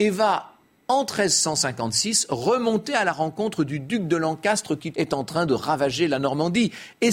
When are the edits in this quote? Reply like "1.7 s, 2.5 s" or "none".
4.9 s